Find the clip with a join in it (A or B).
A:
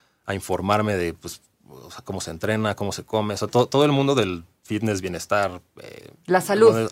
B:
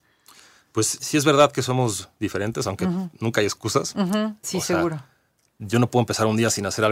B